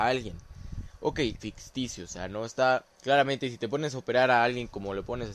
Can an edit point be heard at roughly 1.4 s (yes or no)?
yes